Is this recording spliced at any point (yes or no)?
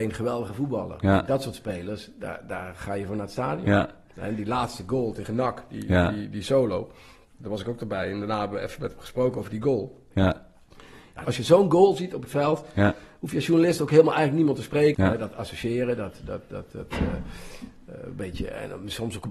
yes